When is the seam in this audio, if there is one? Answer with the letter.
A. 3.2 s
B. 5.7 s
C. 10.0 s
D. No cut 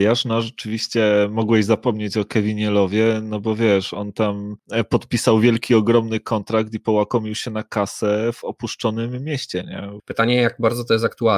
C